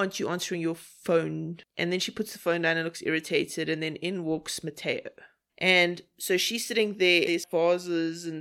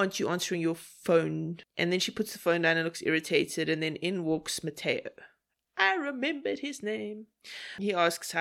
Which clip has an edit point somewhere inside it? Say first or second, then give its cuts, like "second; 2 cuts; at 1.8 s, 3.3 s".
first; 2 cuts; at 5.5 s, 7.2 s